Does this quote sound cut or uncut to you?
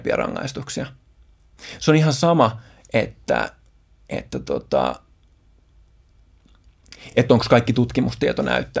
uncut